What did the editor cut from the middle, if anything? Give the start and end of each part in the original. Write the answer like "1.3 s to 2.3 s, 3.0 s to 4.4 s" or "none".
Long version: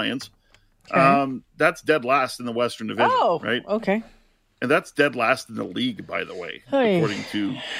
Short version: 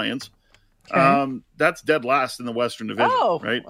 none